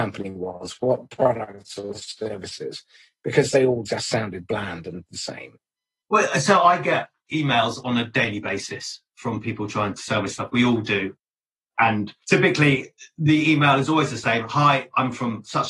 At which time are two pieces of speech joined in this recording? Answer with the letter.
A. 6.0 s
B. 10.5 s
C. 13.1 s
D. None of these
D